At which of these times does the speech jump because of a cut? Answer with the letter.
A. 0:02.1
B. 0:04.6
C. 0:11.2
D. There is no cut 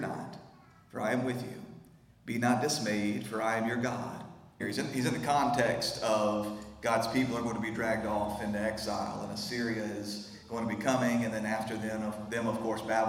B